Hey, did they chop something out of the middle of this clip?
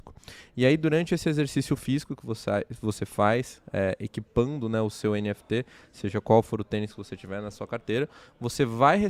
no; 0 cuts

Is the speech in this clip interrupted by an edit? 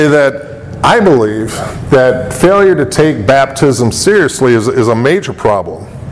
no; 0 cuts

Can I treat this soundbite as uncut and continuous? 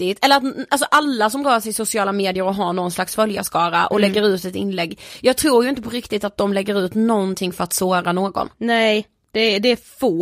yes; 0 cuts

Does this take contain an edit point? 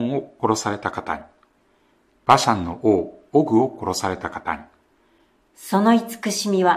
yes; 1 cut; at 2.1 s

